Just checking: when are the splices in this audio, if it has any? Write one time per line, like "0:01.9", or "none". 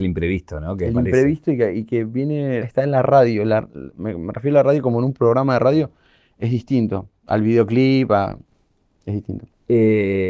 0:02.6